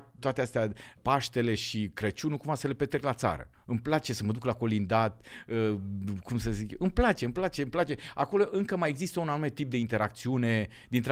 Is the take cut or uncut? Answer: uncut